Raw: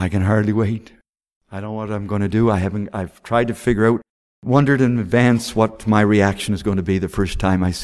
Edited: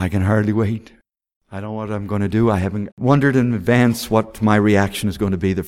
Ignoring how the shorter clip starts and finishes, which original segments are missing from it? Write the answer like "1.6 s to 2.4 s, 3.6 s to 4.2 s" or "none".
2.9 s to 4.4 s